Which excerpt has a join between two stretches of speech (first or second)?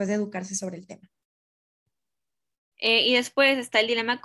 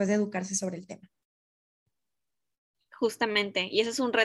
first